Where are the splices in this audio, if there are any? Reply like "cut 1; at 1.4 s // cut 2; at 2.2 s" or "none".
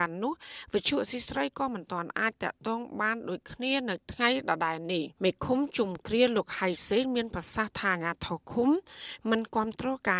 cut 1; at 5.1 s